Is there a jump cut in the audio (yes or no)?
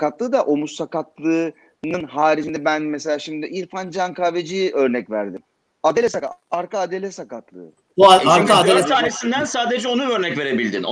no